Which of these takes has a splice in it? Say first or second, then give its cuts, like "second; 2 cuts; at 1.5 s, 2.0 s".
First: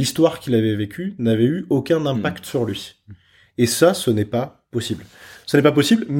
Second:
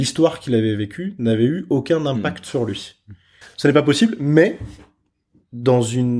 second; 1 cut; at 3.4 s